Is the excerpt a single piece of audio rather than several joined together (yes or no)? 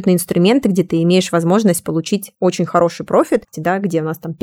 no